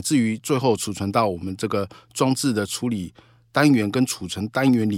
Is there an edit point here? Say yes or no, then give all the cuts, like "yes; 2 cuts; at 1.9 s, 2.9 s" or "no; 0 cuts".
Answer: no; 0 cuts